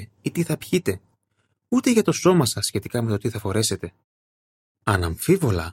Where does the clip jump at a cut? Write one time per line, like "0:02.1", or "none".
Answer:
0:04.7